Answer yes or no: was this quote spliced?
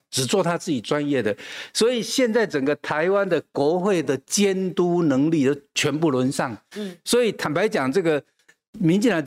no